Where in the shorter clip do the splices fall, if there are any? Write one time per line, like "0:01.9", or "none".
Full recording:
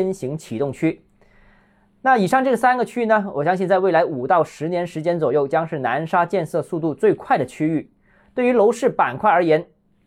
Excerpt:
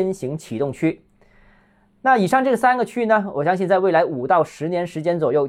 none